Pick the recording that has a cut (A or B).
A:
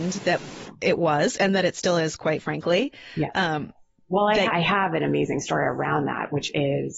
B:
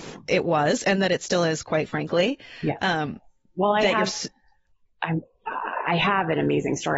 A